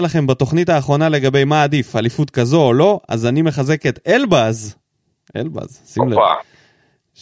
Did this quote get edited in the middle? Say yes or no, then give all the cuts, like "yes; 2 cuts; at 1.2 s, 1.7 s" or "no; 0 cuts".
no; 0 cuts